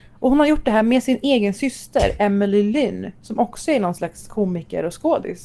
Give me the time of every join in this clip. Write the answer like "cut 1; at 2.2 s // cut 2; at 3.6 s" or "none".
none